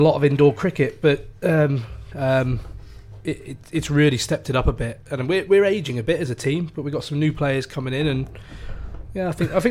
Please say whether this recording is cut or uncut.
cut